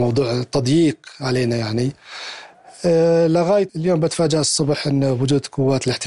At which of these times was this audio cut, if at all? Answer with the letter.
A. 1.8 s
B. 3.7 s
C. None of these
B